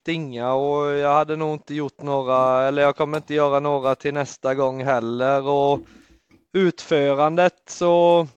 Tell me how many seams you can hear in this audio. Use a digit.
0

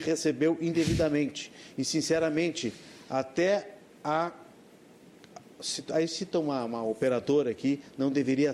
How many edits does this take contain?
0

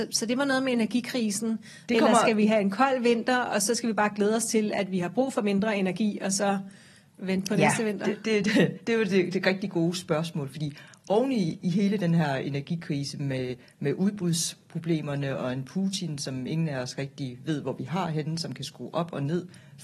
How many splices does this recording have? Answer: 1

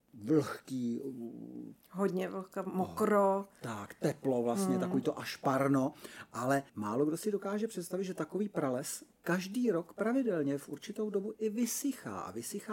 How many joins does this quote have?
2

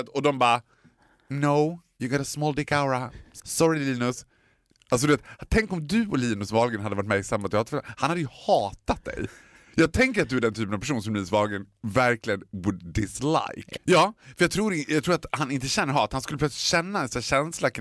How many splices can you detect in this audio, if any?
1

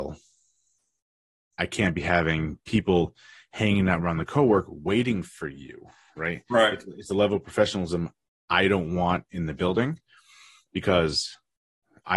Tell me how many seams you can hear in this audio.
0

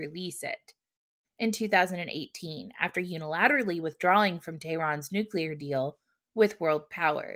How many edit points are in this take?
1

